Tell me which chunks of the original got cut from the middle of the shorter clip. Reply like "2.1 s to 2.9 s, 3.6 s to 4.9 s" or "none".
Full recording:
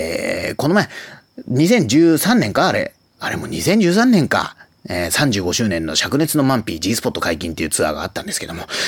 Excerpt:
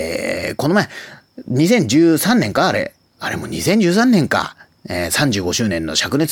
none